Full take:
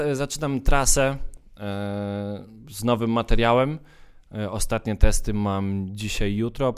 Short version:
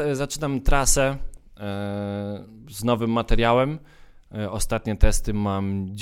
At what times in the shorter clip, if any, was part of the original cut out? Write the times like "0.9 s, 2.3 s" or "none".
none